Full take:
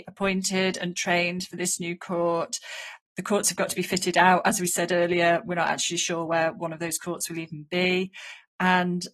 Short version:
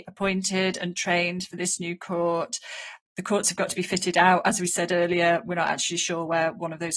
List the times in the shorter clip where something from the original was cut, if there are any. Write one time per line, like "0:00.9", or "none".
none